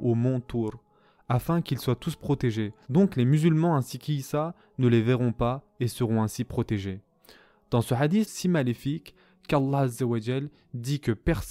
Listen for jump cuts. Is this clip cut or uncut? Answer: cut